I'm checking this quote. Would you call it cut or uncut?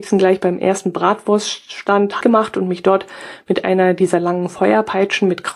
cut